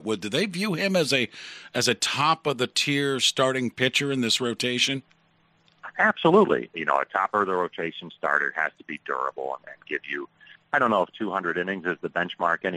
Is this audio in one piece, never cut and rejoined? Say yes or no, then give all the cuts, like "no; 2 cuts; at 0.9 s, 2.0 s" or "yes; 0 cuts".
no; 1 cut; at 6.7 s